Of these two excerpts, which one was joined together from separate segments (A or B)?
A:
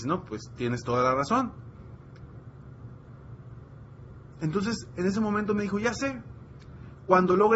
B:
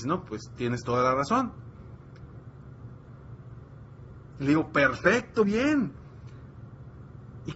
B